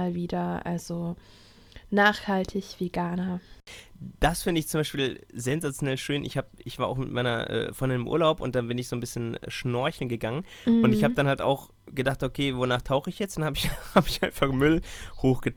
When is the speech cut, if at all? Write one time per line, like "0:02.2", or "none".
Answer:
none